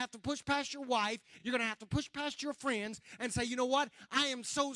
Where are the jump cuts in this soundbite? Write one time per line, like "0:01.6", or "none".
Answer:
none